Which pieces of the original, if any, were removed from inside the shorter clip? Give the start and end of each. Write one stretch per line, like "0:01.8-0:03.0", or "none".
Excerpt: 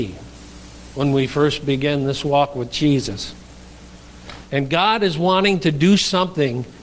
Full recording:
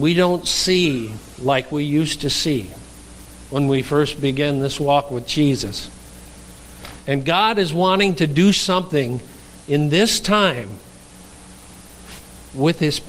none